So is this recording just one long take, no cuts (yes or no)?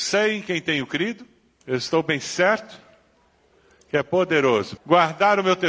no